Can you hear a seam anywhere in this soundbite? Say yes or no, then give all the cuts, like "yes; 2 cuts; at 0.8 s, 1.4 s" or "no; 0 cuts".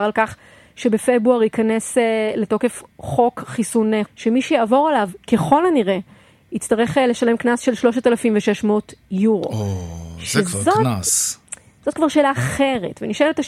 yes; 1 cut; at 4.0 s